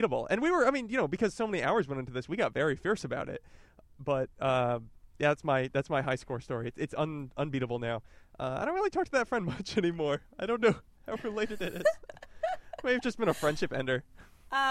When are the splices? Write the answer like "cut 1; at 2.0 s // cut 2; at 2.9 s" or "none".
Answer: none